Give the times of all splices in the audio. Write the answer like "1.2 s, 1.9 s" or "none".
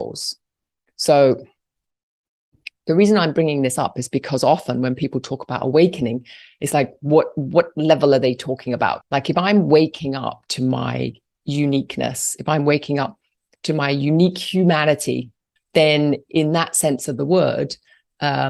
9.0 s, 15.6 s